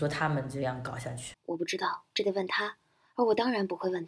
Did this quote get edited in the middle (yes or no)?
yes